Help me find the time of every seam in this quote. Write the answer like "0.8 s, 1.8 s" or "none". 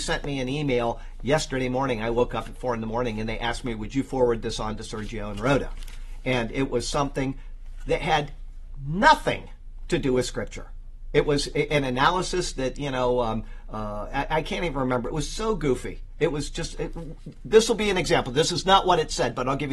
none